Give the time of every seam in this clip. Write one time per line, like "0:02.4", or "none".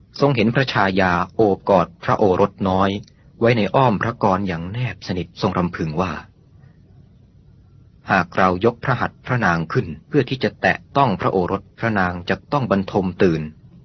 0:05.3
0:10.0
0:11.7